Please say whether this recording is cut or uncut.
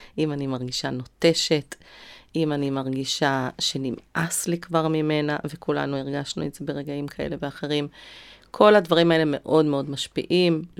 uncut